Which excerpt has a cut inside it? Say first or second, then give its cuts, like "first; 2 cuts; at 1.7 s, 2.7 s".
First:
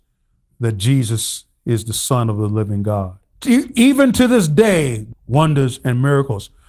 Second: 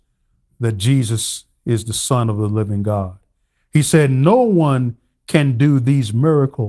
first; 2 cuts; at 3.3 s, 5.1 s